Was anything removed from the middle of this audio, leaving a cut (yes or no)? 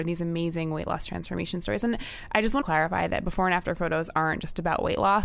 yes